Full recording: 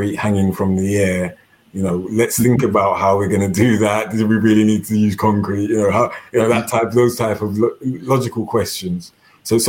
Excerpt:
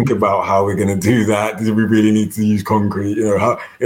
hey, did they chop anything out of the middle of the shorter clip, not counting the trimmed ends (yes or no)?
no